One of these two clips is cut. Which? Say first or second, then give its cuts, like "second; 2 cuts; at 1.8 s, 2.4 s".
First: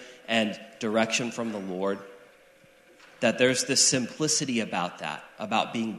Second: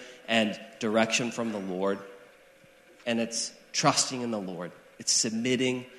second; 1 cut; at 3.0 s